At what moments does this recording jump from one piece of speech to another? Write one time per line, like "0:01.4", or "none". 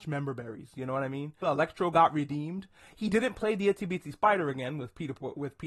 0:01.4